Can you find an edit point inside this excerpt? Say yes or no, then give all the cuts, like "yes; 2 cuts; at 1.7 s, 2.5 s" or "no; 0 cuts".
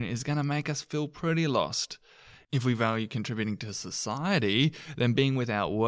no; 0 cuts